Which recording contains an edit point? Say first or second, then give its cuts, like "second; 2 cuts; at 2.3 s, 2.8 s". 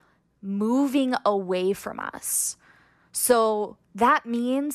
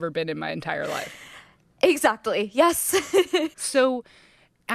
second; 1 cut; at 3.5 s